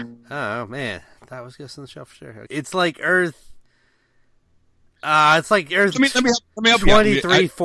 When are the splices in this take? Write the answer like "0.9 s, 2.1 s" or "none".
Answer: 2.5 s, 5.9 s